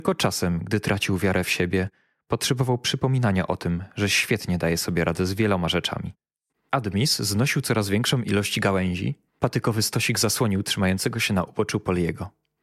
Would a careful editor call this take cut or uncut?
cut